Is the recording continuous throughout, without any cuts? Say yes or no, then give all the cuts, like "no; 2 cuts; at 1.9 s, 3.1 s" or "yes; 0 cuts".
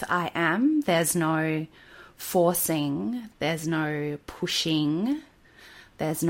no; 1 cut; at 3.3 s